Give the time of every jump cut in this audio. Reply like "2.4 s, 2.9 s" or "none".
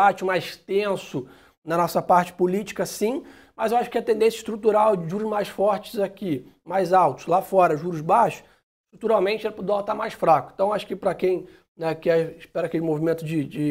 none